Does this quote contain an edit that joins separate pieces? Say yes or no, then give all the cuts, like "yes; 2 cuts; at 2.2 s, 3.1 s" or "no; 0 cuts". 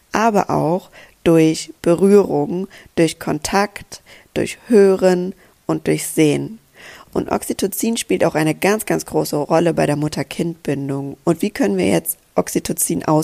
yes; 1 cut; at 11.2 s